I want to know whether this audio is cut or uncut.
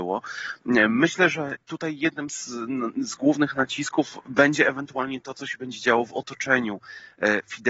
uncut